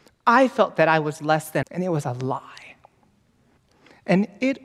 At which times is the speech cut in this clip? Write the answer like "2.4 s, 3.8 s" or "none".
1.6 s